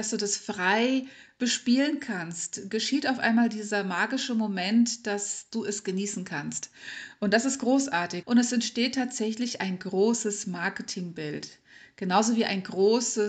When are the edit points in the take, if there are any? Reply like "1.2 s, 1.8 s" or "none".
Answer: 8.2 s